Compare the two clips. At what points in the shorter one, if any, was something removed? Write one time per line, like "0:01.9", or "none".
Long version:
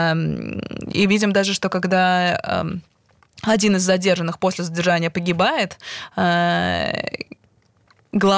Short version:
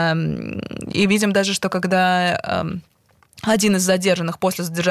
none